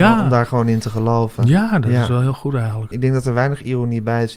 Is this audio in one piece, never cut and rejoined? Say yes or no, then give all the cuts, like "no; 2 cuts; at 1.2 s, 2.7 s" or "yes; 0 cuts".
no; 1 cut; at 2.9 s